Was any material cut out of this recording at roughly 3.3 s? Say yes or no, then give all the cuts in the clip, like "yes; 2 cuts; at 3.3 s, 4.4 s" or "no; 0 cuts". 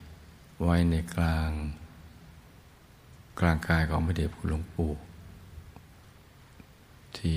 yes; 1 cut; at 3.3 s